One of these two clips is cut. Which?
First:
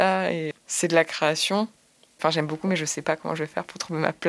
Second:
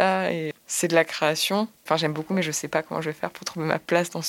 second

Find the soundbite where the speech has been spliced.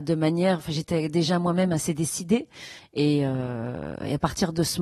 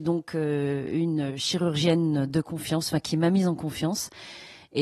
first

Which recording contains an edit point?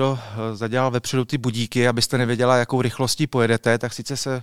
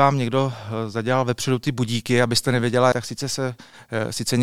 second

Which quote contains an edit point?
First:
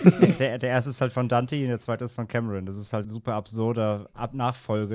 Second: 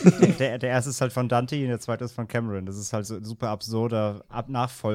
first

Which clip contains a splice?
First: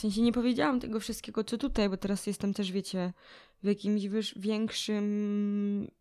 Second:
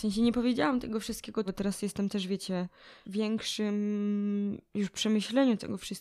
second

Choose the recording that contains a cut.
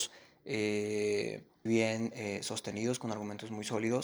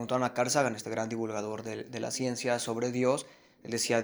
first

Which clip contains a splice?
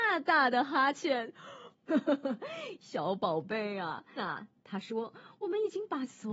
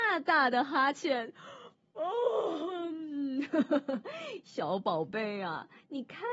first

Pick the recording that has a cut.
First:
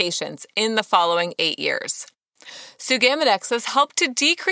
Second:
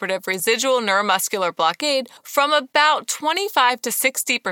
second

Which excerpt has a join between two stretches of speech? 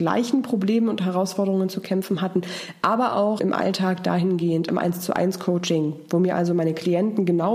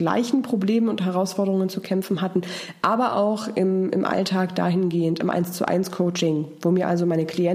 first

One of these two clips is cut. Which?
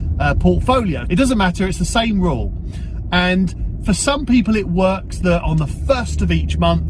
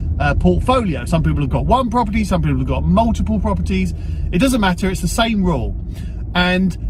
first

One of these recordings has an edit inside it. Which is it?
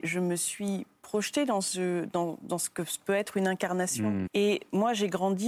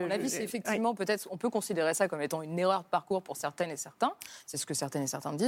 first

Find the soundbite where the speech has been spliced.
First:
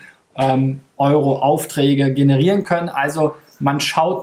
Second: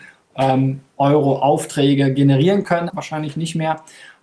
second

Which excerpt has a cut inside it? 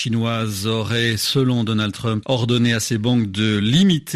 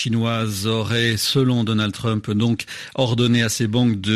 first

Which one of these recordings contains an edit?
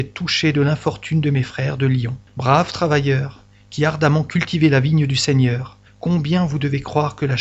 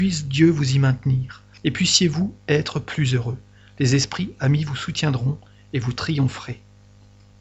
first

